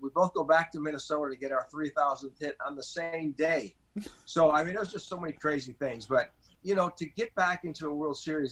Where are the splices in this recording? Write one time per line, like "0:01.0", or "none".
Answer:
none